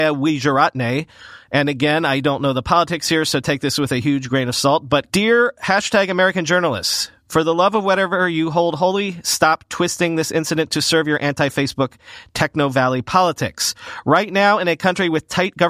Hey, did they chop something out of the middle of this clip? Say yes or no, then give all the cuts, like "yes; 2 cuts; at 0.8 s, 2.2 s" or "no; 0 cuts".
yes; 1 cut; at 5.1 s